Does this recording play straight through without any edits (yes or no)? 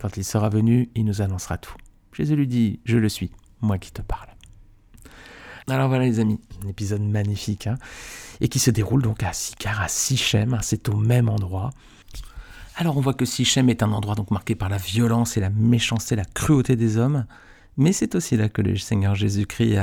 yes